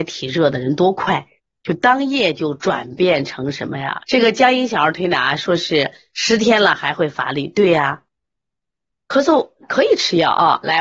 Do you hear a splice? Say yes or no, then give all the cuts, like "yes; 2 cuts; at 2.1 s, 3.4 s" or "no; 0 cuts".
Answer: yes; 1 cut; at 4.0 s